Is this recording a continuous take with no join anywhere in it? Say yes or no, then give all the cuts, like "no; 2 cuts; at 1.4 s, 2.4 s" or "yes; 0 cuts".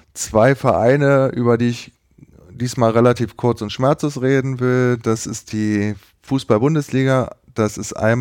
yes; 0 cuts